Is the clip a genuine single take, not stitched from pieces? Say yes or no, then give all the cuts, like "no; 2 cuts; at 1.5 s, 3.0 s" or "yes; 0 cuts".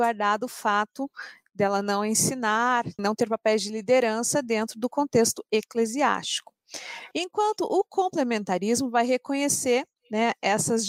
no; 2 cuts; at 3.0 s, 7.1 s